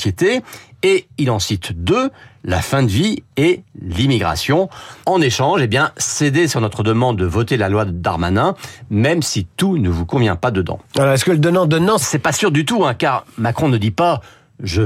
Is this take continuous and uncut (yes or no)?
no